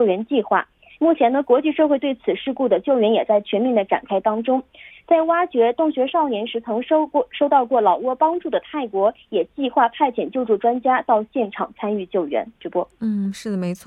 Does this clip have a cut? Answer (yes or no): yes